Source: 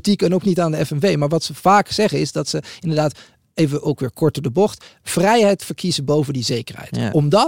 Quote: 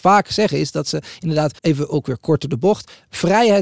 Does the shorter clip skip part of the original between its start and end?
yes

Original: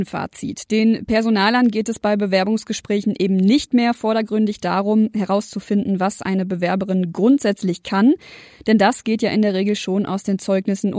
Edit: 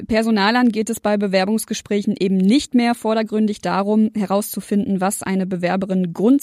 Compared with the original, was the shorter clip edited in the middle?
no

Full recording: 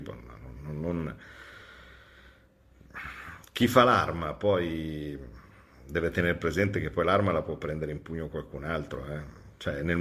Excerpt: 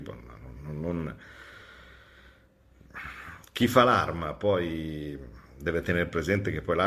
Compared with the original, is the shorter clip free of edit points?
no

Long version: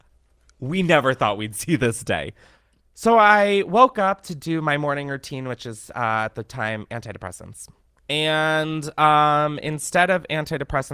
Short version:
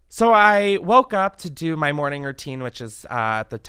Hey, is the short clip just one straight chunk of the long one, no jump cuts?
yes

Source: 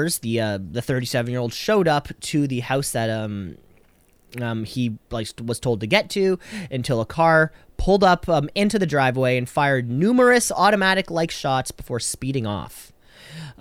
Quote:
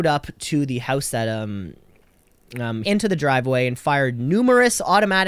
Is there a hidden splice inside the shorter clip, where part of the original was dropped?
yes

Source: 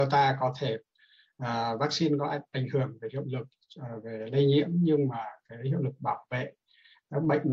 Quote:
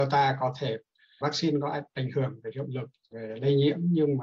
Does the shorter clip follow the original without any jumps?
no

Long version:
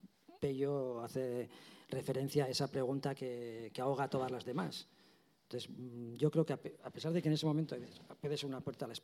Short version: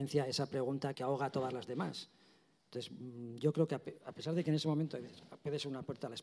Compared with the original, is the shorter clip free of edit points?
no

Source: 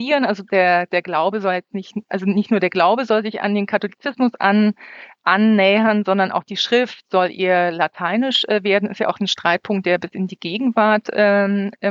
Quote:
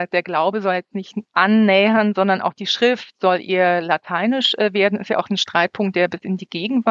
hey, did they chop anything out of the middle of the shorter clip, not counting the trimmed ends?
yes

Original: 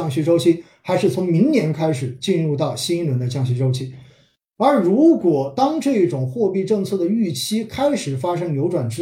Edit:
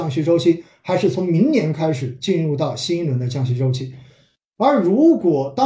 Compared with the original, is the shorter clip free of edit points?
yes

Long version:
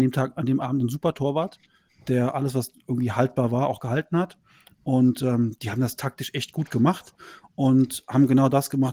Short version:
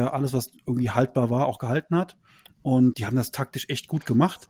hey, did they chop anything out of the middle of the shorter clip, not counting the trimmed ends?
yes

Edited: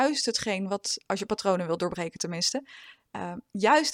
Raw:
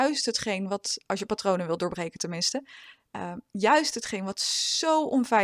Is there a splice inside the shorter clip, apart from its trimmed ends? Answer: no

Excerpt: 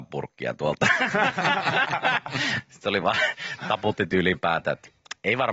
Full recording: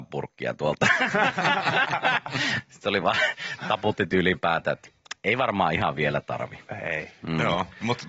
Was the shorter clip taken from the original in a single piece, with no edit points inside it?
yes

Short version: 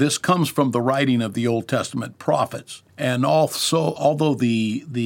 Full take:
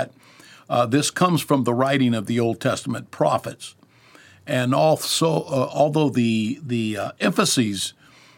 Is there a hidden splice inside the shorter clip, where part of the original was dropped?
yes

